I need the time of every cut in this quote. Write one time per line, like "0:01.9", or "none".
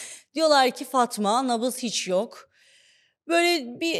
none